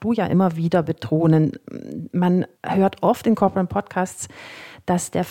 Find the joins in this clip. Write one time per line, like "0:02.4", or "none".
0:02.5